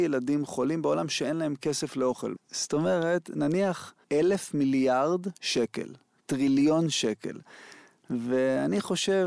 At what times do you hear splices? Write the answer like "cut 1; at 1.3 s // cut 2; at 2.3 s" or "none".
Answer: cut 1; at 2.4 s // cut 2; at 4.0 s